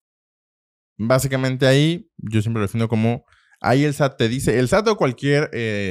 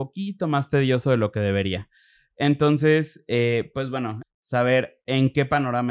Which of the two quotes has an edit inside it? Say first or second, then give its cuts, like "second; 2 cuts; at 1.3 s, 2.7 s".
second; 1 cut; at 4.2 s